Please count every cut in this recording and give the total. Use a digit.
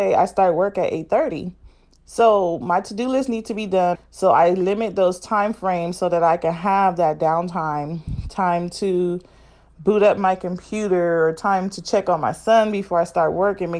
1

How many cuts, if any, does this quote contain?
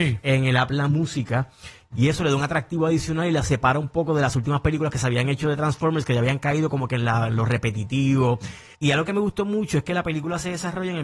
2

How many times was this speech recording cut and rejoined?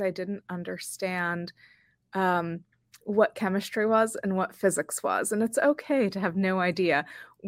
0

